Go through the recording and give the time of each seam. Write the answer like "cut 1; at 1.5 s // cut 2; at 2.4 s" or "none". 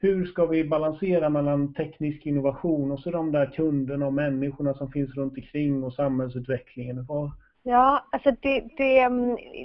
cut 1; at 7.5 s